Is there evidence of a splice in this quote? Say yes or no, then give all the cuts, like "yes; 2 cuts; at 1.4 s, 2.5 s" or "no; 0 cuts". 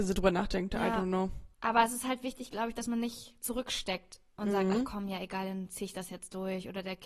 yes; 1 cut; at 1.5 s